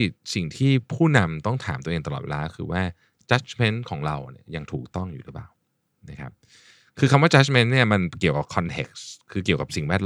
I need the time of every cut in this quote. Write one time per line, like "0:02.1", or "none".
none